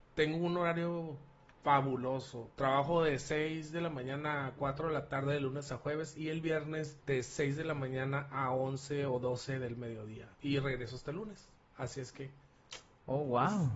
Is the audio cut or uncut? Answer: cut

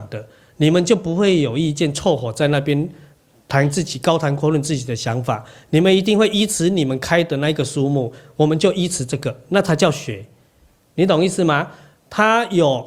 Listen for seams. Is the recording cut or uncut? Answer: uncut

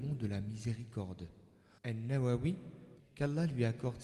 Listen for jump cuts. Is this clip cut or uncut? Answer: cut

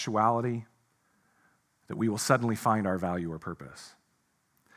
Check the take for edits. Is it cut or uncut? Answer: uncut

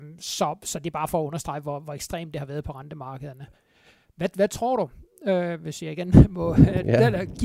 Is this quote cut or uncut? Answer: uncut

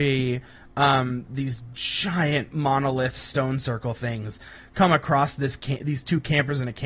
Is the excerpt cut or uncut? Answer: uncut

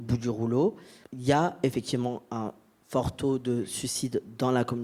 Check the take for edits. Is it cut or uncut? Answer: uncut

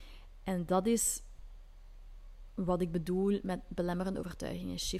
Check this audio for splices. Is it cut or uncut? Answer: uncut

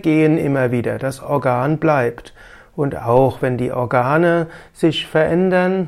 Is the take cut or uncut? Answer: uncut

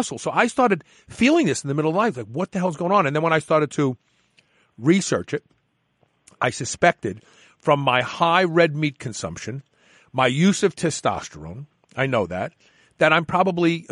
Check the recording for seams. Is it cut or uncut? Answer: uncut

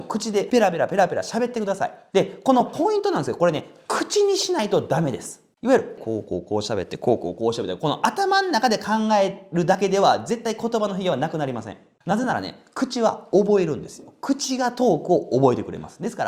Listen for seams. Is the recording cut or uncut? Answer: uncut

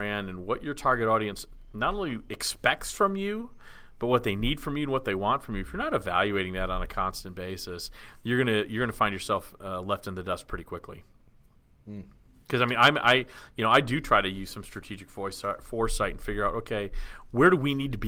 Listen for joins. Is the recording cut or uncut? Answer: uncut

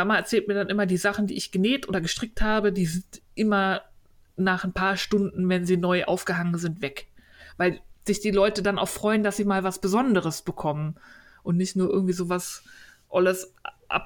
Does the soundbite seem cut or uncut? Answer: uncut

